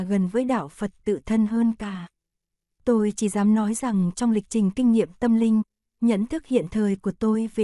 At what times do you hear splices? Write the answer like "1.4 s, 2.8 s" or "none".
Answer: none